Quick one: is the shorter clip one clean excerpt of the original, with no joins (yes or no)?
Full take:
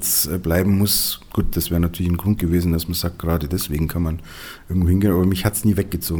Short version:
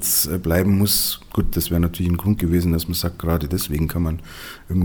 yes